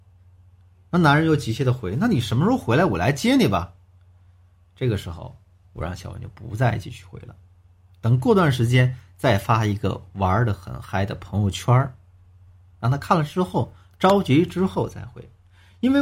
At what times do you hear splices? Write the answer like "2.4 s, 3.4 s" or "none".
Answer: none